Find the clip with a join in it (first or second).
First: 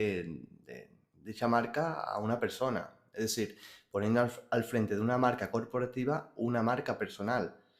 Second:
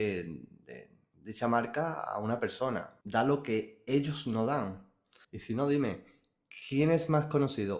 second